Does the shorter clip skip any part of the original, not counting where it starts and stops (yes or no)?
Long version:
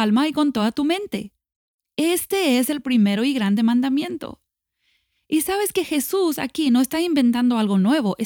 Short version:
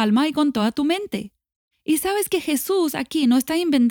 yes